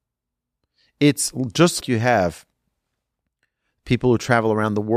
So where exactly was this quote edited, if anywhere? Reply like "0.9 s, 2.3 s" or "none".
1.8 s